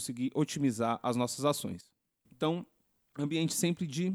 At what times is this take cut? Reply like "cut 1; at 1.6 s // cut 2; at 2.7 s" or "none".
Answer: cut 1; at 2.2 s